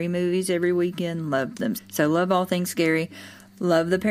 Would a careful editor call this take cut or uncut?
cut